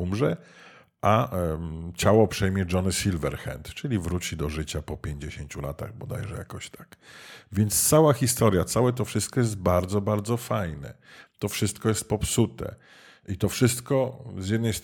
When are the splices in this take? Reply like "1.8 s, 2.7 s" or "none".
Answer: 11.3 s